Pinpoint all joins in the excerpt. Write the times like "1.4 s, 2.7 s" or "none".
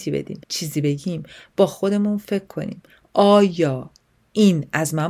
none